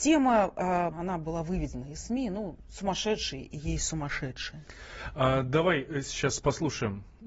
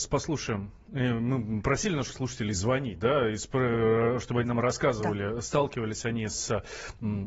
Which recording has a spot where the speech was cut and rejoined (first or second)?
first